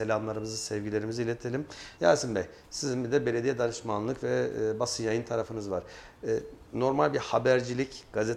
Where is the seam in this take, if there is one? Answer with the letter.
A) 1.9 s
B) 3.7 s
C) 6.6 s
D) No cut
A